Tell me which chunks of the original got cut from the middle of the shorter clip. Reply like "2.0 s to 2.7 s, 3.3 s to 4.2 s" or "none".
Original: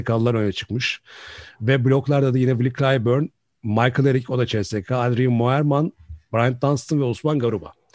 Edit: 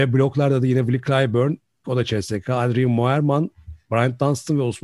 3.6 s to 4.3 s